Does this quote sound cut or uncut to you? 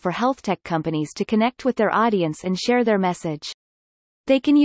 uncut